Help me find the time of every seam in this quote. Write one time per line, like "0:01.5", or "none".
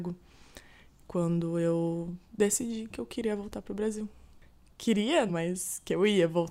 0:05.3